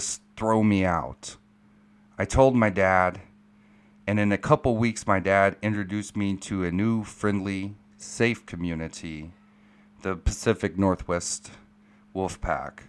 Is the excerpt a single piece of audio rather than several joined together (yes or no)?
yes